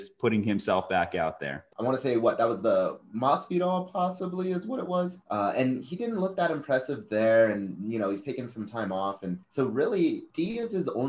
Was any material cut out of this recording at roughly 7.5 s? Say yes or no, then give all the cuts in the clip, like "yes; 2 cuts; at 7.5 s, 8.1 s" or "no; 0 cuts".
no; 1 cut; at 1.7 s